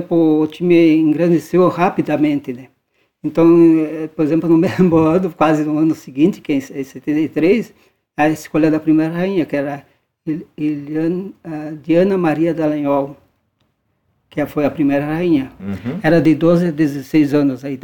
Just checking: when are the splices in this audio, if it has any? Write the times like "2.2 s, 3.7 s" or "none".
15.6 s